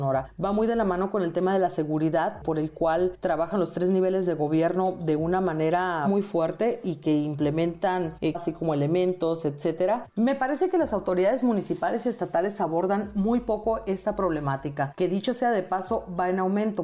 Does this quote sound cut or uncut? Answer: cut